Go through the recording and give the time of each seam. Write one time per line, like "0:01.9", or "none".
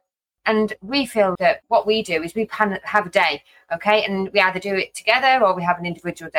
0:01.4